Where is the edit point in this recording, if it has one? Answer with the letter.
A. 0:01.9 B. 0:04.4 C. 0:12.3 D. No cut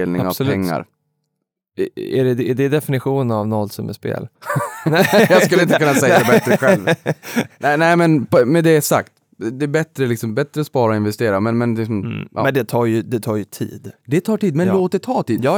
B